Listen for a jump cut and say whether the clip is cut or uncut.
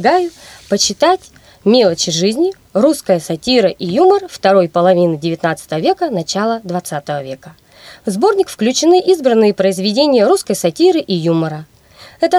uncut